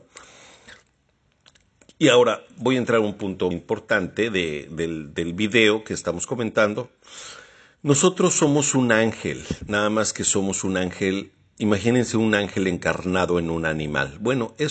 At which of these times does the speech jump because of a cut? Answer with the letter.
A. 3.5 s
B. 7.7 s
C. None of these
A